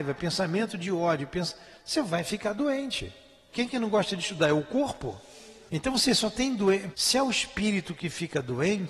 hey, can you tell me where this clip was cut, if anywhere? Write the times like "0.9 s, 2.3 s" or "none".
3.5 s, 5.7 s, 6.9 s